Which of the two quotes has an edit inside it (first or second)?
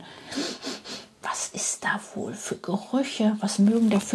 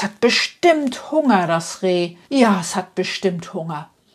second